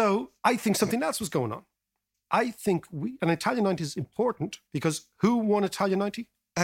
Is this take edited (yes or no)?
yes